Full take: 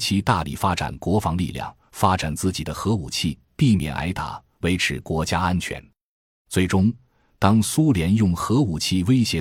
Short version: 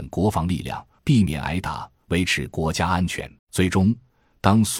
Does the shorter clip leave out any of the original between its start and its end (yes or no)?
yes